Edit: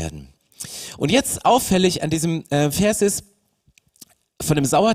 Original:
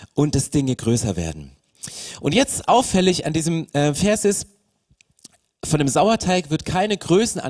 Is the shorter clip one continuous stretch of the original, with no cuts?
yes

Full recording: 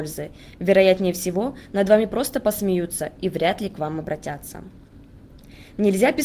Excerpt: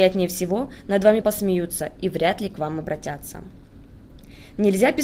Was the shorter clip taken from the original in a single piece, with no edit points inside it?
no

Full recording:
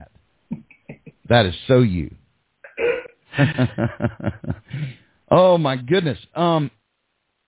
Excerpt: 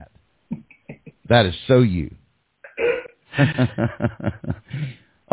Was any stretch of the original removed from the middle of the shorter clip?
no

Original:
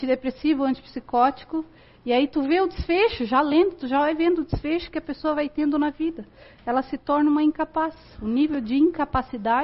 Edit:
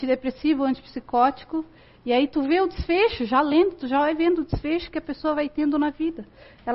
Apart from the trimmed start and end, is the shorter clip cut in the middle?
no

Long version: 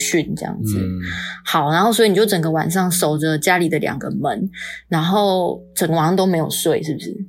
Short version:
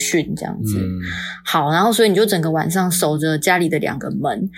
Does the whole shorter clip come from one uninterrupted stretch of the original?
yes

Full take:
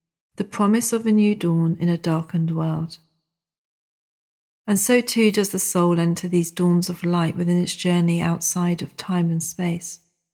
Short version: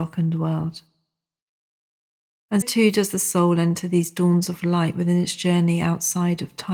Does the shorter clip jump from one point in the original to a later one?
yes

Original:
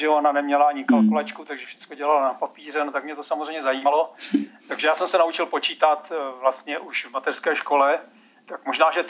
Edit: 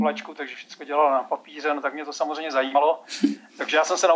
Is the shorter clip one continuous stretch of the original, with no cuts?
yes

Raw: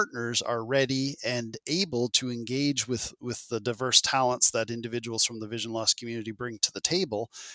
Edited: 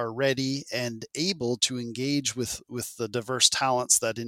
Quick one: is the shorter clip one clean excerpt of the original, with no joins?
yes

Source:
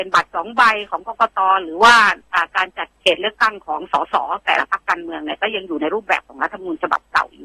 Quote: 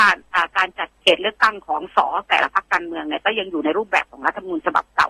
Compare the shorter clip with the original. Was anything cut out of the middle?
yes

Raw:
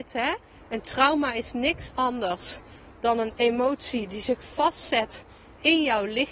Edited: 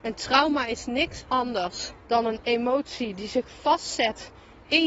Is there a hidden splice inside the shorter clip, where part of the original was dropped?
yes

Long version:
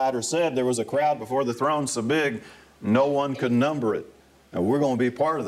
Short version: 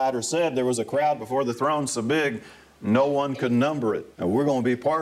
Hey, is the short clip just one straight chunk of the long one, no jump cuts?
no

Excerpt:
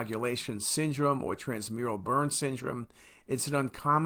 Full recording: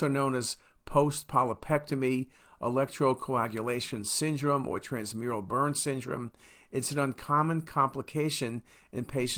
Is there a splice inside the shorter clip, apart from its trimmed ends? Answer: no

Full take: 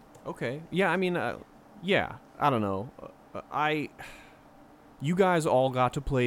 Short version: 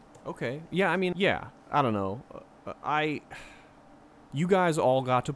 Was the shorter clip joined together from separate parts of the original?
yes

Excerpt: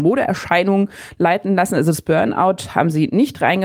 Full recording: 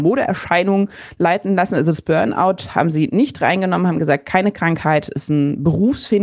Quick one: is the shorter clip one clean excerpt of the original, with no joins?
yes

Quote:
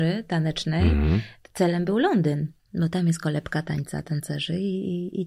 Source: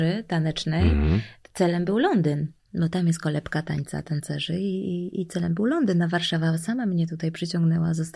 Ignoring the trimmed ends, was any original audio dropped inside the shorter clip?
no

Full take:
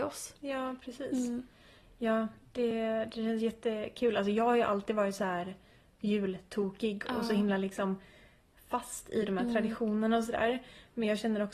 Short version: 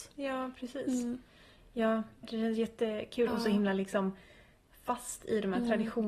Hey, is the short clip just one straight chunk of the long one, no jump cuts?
no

